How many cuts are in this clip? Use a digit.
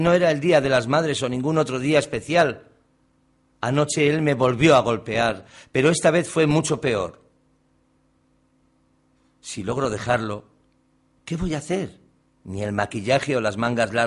1